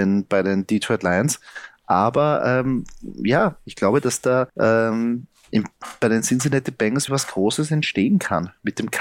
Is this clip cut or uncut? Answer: cut